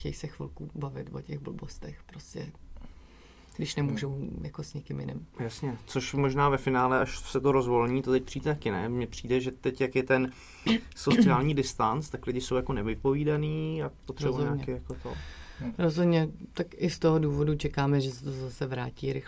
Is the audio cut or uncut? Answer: uncut